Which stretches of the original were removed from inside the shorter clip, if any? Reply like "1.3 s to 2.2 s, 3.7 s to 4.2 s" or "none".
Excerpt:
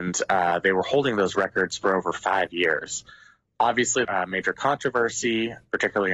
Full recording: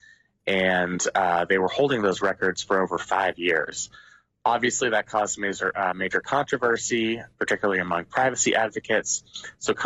4.9 s to 5.7 s